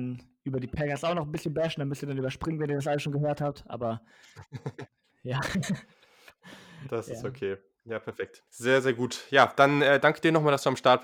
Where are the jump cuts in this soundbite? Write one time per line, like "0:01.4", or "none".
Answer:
0:08.5